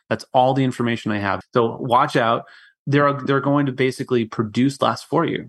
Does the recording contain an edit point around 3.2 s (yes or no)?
no